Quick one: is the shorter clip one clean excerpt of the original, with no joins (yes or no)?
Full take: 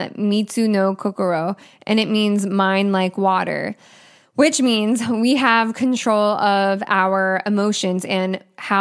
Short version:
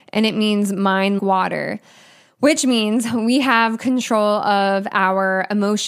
no